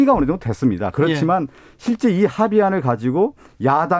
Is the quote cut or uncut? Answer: uncut